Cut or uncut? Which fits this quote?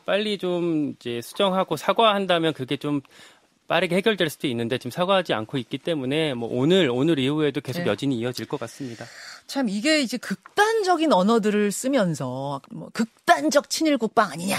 cut